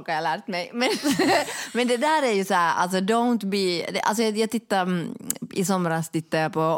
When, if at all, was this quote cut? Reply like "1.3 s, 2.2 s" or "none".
none